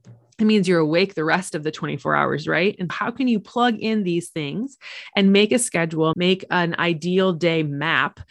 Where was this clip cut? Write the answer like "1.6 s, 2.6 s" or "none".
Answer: 2.9 s, 6.1 s